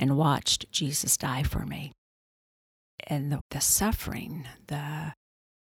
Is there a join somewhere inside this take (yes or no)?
yes